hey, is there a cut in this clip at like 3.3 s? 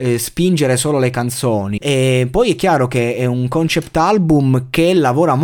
no; 1 cut; at 1.8 s

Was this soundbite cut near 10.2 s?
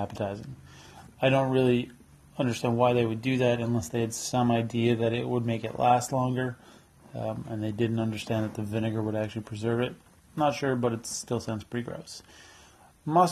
no; 1 cut; at 1.1 s

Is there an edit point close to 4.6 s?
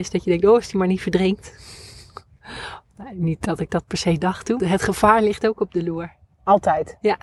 yes; 1 cut; at 4.6 s

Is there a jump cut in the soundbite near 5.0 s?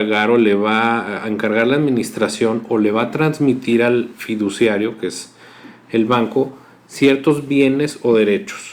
no; 0 cuts

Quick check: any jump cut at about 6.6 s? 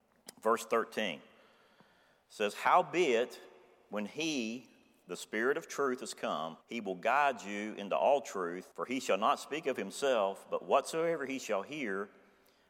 yes; 2 cuts; at 6.6 s, 8.7 s

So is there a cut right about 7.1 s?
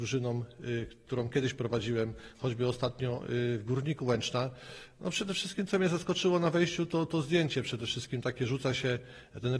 yes; 1 cut; at 7.1 s

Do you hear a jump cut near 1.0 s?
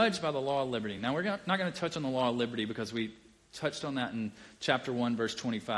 no; 0 cuts

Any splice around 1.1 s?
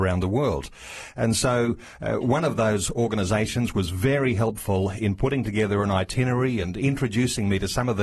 no; 1 cut; at 6.6 s

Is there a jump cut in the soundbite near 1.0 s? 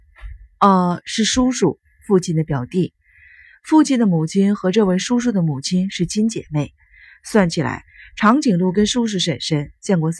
no; 0 cuts

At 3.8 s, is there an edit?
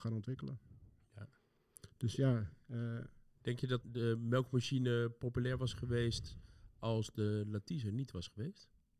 yes; 1 cut; at 3.8 s

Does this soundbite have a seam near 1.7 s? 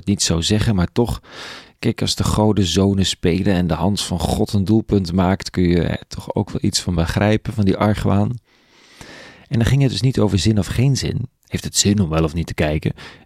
no; 0 cuts

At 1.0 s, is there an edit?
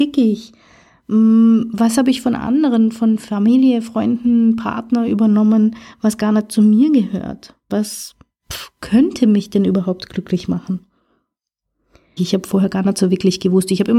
no; 2 cuts; at 7.7 s, 12.2 s

